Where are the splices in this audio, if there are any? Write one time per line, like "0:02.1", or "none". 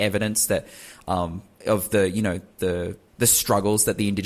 0:03.1